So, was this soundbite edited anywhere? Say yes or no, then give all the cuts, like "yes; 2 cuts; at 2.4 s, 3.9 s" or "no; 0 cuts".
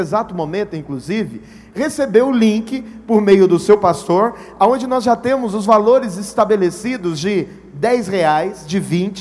no; 0 cuts